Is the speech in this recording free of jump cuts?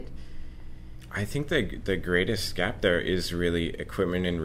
no; 1 cut; at 1.1 s

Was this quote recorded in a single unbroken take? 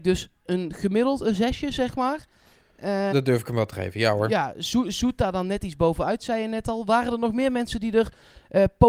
no; 1 cut; at 3.1 s

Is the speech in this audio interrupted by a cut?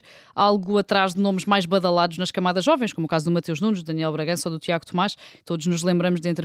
no; 0 cuts

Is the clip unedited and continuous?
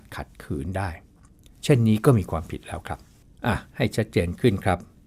yes; 0 cuts

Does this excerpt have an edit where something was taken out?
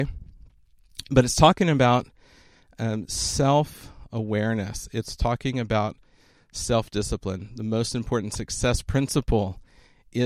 no; 0 cuts

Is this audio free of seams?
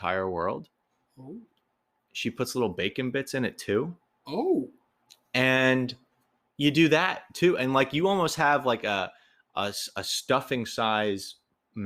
yes; 0 cuts

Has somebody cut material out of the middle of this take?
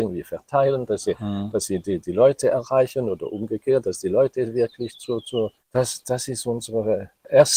yes; 1 cut; at 5.6 s

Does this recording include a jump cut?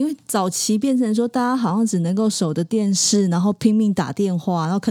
no; 0 cuts

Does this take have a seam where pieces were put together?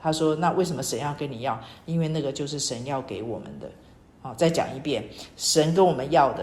no; 0 cuts

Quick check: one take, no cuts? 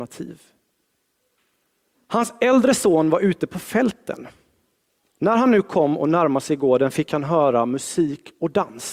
no; 1 cut; at 1.9 s

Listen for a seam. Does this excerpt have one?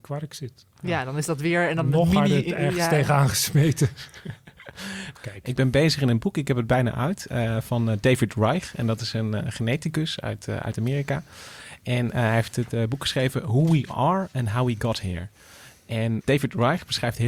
yes; 1 cut; at 5.1 s

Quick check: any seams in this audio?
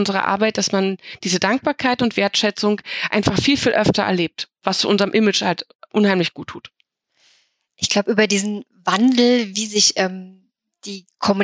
no; 0 cuts

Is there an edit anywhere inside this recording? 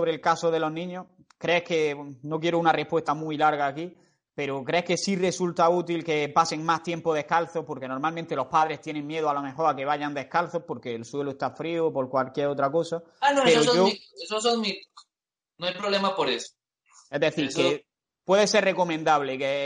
no; 0 cuts

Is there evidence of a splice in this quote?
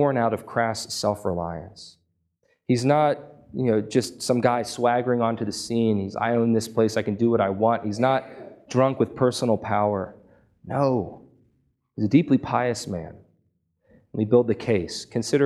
no; 0 cuts

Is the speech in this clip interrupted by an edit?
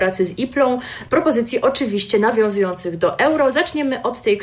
no; 0 cuts

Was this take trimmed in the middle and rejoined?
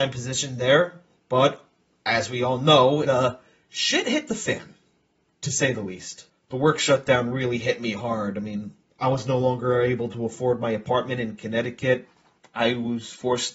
yes; 1 cut; at 3.0 s

